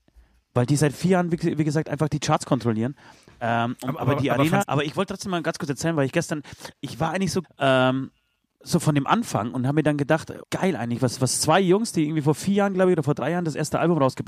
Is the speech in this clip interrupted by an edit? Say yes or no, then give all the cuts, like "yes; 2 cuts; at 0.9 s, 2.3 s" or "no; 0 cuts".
yes; 3 cuts; at 4.6 s, 7.4 s, 10.4 s